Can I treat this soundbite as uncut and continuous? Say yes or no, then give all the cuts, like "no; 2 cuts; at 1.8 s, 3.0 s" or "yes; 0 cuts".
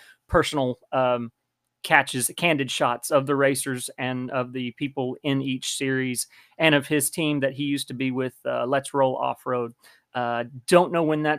no; 1 cut; at 10.0 s